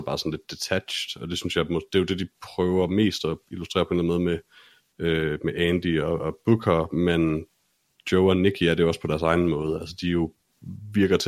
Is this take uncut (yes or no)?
yes